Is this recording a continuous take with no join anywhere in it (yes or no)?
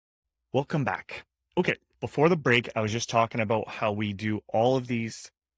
yes